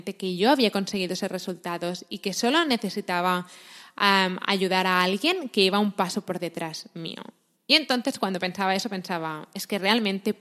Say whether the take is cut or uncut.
uncut